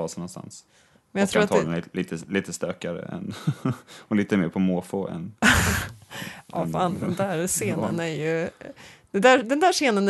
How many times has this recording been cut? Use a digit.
0